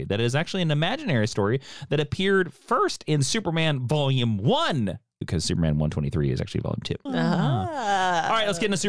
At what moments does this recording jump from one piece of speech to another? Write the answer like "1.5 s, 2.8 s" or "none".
5.2 s, 7.1 s